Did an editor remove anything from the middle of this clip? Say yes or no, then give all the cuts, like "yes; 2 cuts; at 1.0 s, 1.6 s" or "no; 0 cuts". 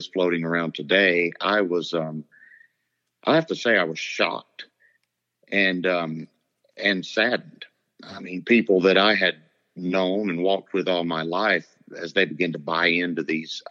no; 0 cuts